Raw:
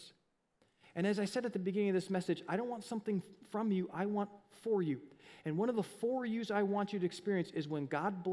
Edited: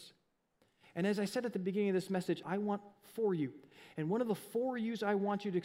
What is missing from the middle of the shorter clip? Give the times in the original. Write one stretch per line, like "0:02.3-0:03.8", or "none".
0:02.4-0:03.9